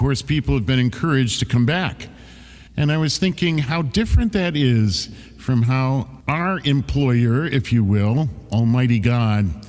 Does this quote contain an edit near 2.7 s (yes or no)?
yes